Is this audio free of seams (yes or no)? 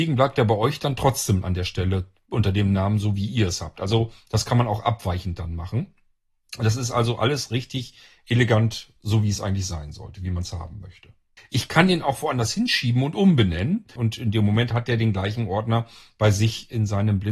no